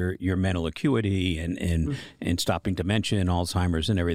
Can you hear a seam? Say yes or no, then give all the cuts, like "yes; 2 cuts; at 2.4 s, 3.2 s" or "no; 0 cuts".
no; 0 cuts